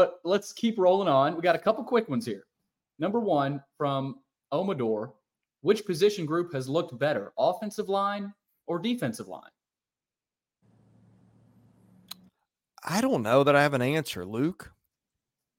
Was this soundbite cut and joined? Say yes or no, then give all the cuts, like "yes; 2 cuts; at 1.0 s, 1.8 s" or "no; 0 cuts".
no; 0 cuts